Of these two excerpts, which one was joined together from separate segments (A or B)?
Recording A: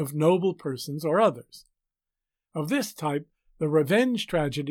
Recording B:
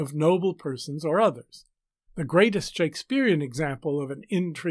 B